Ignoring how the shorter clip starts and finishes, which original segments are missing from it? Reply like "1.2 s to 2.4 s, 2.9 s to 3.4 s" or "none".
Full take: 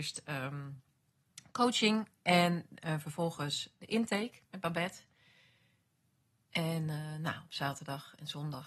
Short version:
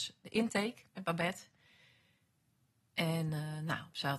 none